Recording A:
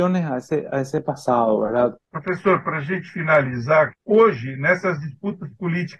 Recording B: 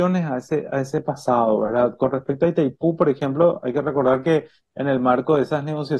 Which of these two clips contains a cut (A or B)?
A